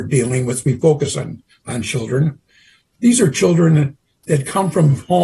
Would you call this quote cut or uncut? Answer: uncut